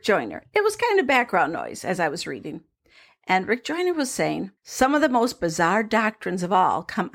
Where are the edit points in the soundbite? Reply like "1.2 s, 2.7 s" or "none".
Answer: 4.6 s